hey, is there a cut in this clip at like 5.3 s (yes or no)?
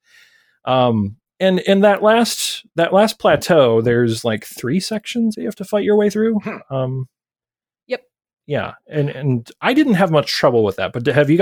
yes